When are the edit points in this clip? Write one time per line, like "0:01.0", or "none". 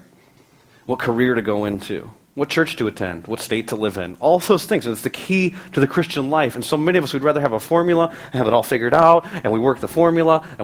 0:04.8